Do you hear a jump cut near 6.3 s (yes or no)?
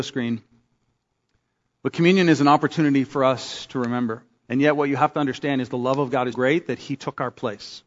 yes